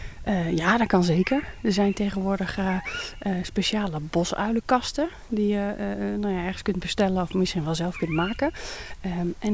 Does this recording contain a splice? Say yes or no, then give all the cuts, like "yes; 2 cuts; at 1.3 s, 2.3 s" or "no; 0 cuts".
no; 0 cuts